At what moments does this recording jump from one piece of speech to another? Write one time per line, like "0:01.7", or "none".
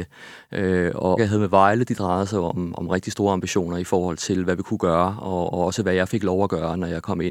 0:01.2